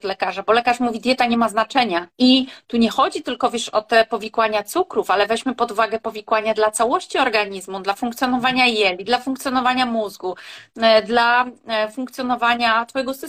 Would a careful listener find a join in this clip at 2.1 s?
yes; 1 cut; at 2.1 s

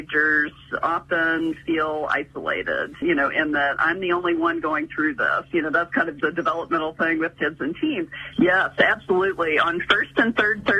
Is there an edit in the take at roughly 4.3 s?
no; 3 cuts; at 3.0 s, 6.2 s, 8.3 s

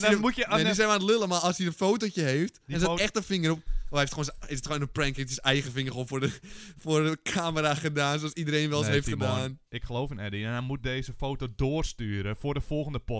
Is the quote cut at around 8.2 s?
no; 1 cut; at 9.7 s

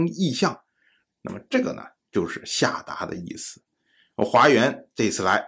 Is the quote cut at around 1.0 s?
yes; 1 cut; at 1.0 s

